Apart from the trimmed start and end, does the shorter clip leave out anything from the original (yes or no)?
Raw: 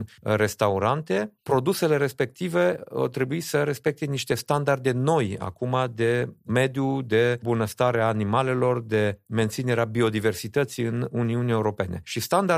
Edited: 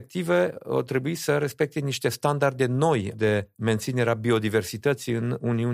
yes